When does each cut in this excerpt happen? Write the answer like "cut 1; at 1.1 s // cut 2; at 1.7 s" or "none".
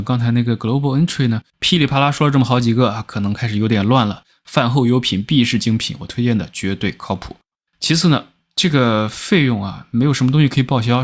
cut 1; at 1.5 s // cut 2; at 4.4 s // cut 3; at 7.7 s